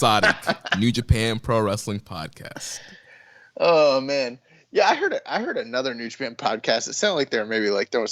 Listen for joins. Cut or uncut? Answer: uncut